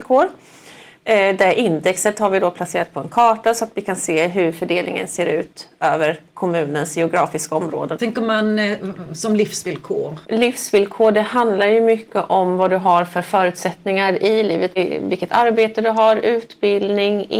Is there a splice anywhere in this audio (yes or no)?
yes